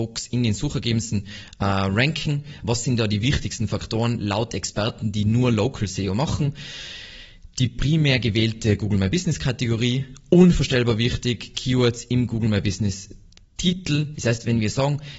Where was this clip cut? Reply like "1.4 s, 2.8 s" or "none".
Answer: 14.1 s